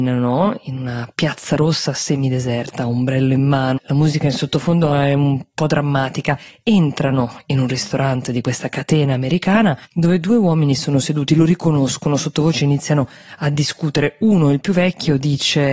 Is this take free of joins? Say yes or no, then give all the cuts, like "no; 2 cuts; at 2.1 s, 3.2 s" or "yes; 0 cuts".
no; 2 cuts; at 3.8 s, 9.8 s